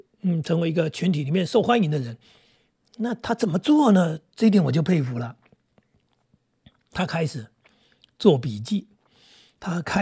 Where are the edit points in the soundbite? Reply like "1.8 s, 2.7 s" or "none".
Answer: none